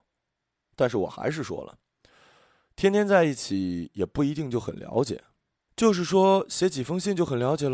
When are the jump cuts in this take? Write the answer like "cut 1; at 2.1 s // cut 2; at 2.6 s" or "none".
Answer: cut 1; at 5.7 s